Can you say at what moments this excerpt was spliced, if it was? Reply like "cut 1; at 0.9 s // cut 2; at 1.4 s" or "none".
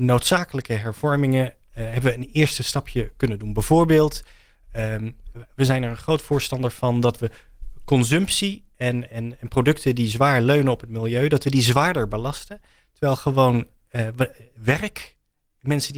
none